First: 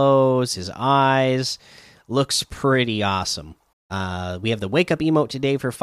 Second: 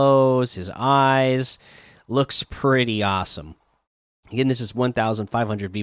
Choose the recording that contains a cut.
first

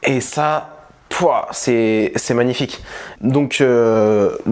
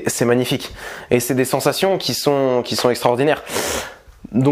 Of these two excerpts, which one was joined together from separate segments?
first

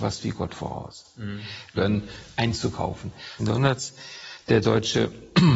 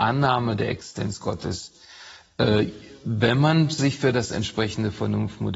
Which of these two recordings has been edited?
first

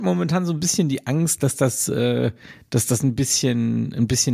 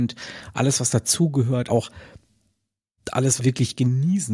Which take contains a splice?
second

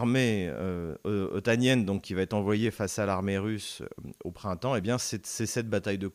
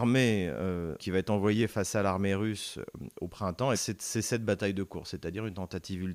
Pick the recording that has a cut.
second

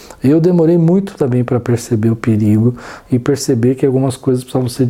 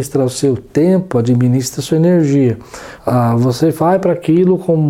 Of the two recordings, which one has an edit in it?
second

